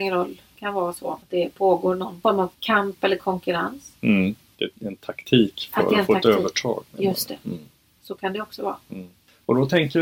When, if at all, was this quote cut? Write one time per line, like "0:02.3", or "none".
0:04.5